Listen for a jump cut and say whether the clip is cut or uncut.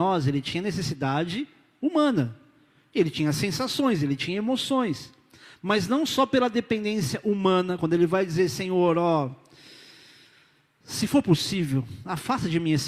uncut